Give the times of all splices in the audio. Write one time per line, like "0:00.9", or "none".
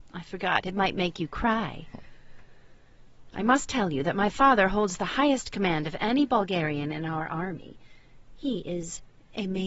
none